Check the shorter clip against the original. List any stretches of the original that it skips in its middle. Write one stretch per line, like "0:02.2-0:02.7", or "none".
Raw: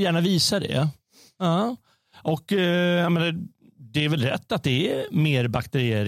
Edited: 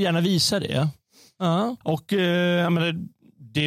0:01.8-0:02.2